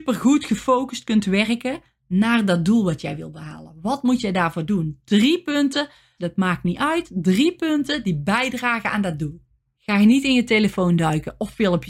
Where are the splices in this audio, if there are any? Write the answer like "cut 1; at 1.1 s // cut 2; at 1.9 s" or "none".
cut 1; at 6.2 s // cut 2; at 9.8 s